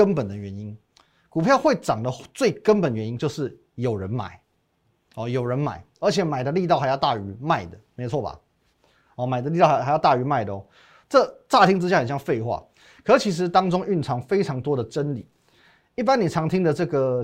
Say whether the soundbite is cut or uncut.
uncut